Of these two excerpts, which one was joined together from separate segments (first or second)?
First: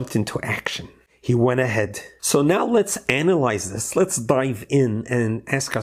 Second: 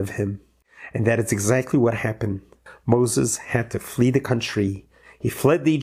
first